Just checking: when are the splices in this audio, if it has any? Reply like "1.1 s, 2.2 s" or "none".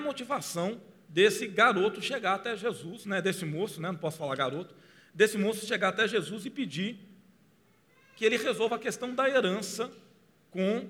none